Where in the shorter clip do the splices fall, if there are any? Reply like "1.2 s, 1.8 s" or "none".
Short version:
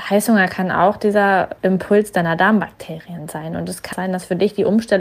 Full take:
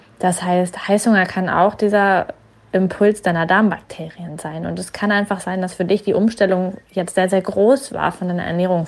1.6 s, 3.9 s